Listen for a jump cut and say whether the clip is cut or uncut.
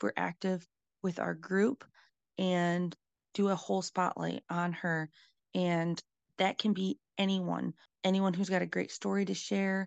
uncut